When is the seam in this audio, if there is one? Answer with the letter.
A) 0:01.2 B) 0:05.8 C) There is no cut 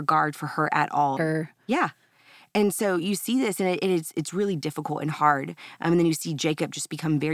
A